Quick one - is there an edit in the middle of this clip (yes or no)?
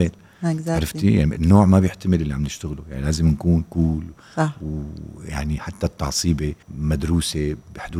yes